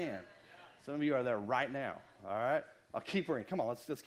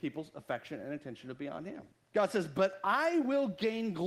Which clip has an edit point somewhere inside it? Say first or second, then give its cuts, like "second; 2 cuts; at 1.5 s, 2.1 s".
second; 1 cut; at 1.9 s